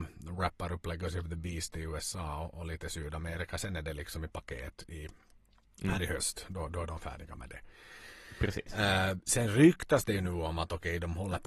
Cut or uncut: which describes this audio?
uncut